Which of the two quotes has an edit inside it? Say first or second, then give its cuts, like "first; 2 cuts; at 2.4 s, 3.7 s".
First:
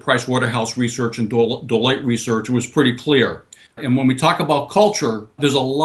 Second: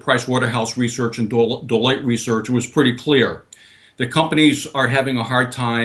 first; 1 cut; at 3.7 s